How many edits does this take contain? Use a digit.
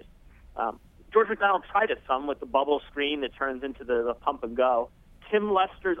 1